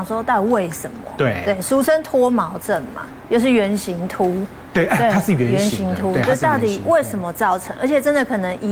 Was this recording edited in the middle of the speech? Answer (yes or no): no